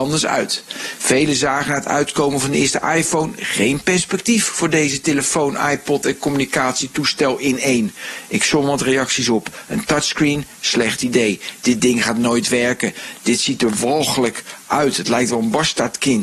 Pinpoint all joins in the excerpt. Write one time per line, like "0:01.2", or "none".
none